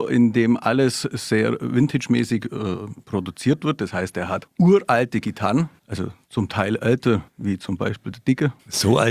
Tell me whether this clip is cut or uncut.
uncut